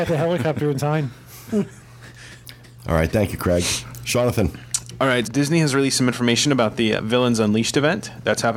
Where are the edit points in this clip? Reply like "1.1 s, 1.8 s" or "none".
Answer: 5.2 s, 7.0 s